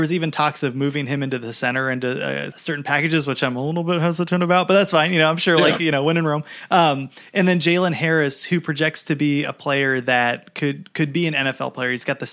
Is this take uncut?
no; 1 cut; at 2.5 s

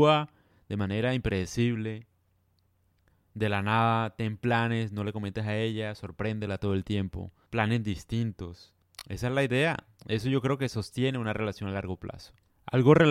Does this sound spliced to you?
no; 0 cuts

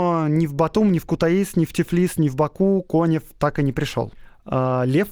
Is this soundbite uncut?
yes; 0 cuts

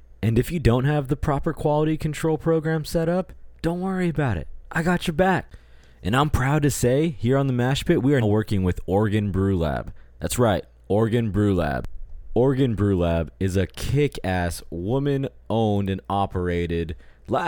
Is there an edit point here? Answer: yes; 1 cut; at 8.2 s

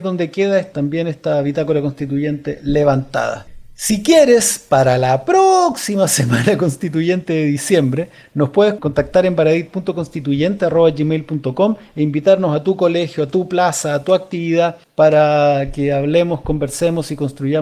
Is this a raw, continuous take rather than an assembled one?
yes; 0 cuts

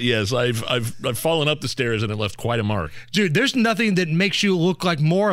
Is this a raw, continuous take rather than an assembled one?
yes; 0 cuts

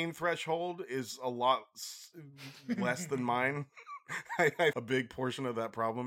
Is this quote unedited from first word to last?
no; 1 cut; at 4.7 s

